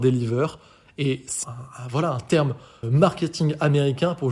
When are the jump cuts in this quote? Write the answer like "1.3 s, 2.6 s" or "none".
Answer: 1.4 s, 2.8 s